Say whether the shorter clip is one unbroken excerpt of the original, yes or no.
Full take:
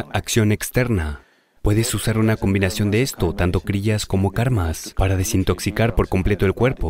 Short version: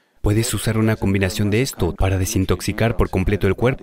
no